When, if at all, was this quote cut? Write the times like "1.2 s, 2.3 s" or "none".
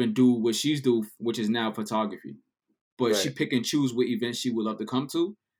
2.9 s